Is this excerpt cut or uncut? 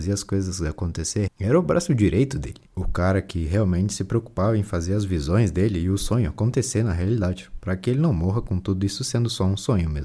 cut